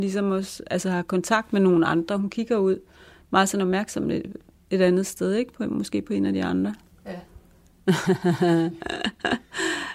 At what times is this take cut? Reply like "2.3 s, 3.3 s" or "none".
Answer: none